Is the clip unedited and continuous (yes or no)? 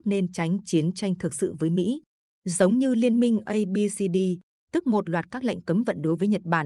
no